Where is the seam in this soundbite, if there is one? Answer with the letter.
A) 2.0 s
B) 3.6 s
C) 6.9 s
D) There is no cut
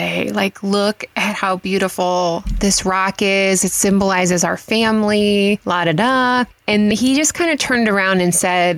C